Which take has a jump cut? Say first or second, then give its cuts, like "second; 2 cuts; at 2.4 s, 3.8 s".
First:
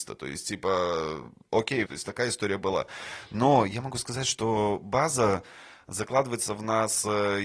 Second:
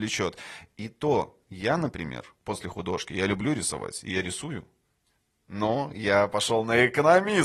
first; 1 cut; at 1.9 s